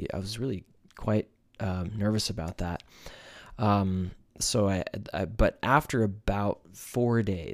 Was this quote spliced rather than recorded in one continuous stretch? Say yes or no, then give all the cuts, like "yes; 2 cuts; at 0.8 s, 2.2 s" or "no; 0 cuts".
no; 0 cuts